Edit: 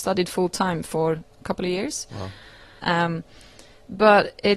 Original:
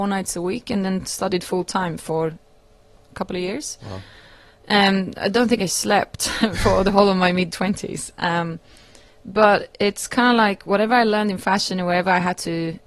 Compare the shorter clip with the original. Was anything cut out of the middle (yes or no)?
yes